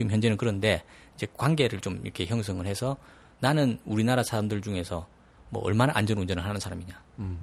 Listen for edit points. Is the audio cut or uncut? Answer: uncut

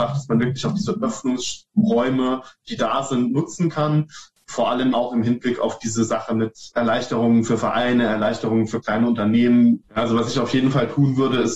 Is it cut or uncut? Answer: cut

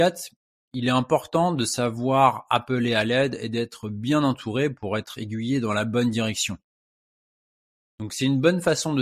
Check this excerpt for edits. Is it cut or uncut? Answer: cut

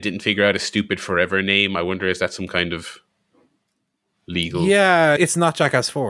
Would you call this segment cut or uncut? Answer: cut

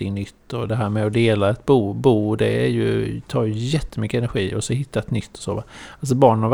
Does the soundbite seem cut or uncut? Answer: uncut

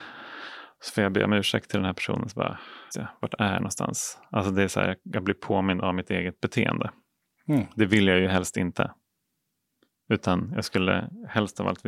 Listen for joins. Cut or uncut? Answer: cut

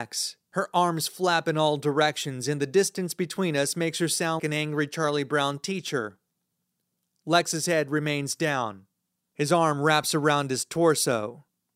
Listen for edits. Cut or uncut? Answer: cut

